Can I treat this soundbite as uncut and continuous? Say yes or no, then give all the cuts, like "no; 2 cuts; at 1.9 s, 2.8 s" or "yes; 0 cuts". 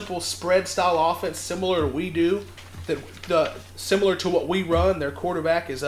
yes; 0 cuts